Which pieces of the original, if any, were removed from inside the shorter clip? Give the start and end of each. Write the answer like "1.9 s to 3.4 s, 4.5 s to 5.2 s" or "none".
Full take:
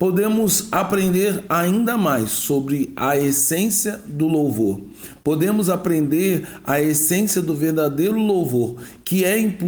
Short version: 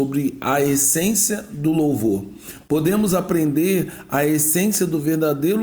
none